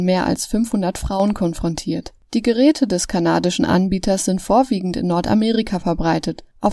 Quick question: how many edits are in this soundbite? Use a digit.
1